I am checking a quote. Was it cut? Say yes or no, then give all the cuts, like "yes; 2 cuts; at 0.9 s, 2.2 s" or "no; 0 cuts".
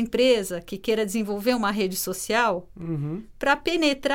no; 0 cuts